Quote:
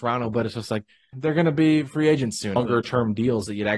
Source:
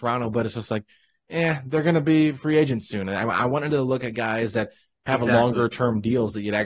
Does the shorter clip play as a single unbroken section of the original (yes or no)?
no